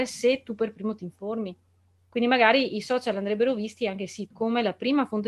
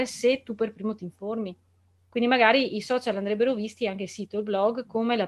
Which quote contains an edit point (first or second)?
first